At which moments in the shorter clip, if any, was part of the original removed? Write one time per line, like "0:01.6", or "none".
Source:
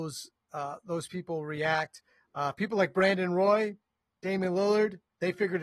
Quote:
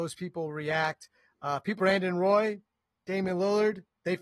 0:01.8